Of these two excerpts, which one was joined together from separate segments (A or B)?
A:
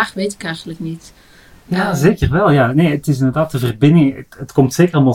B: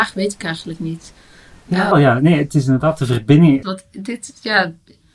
B